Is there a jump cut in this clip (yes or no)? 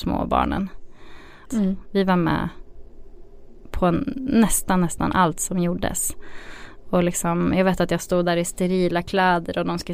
yes